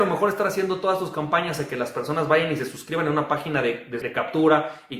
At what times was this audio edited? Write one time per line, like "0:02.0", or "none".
0:04.0